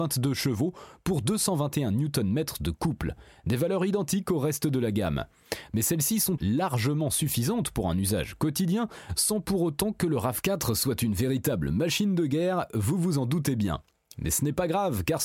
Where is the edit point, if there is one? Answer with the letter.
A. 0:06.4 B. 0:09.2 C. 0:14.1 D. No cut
A